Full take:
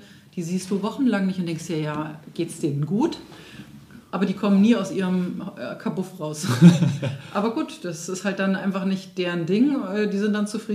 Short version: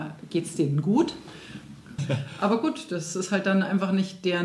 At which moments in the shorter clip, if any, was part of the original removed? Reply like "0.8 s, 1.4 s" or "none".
2.0 s